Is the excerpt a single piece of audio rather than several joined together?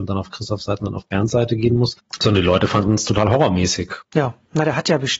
no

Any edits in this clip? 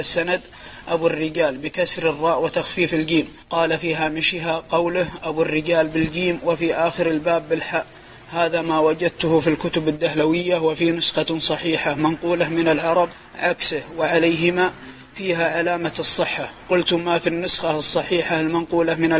yes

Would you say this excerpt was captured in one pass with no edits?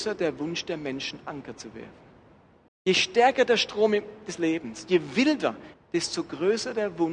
no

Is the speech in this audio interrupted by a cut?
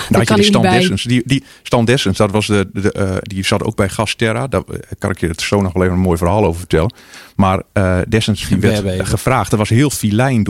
no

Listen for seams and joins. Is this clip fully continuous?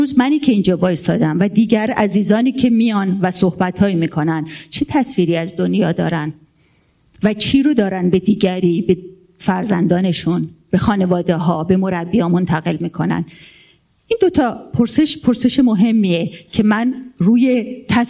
yes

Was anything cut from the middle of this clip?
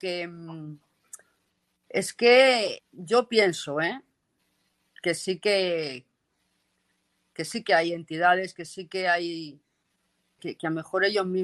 yes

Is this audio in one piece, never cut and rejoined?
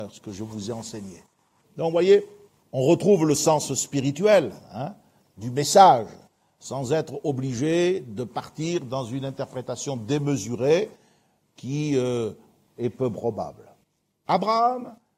no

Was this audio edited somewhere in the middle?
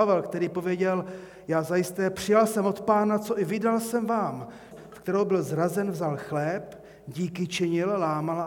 yes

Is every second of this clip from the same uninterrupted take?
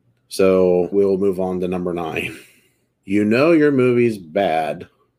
no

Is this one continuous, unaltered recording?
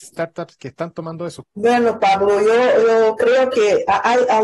no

